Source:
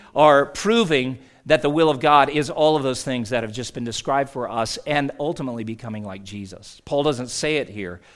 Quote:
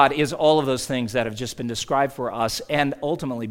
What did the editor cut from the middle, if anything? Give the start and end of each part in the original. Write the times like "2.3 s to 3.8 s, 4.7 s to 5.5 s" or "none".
none